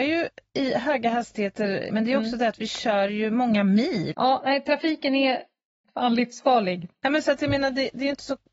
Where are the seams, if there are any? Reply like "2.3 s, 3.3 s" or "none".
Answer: 1.9 s, 4.1 s